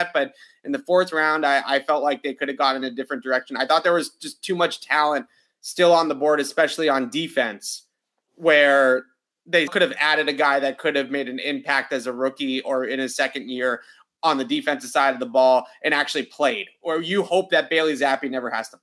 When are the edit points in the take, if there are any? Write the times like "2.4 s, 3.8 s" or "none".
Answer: 9.7 s